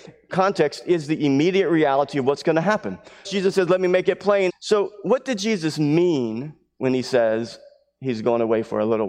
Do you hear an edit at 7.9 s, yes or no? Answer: no